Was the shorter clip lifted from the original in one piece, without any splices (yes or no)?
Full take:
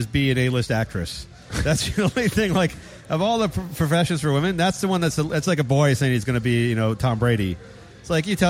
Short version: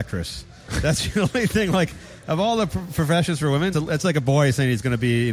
no